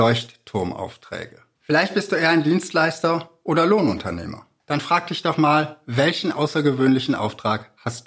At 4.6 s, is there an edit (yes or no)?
no